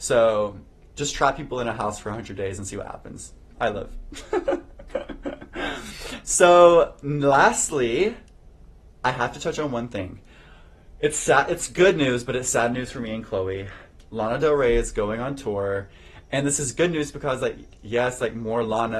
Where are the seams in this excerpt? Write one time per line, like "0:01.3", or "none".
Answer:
none

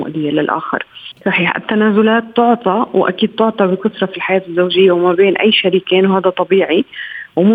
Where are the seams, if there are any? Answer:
0:01.1

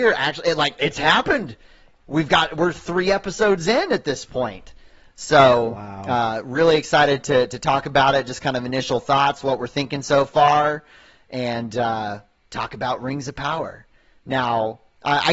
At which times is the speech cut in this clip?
none

